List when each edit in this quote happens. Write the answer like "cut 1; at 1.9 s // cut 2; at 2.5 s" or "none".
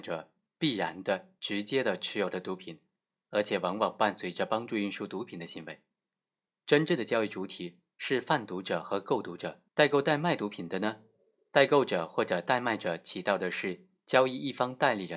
cut 1; at 6.5 s // cut 2; at 9.7 s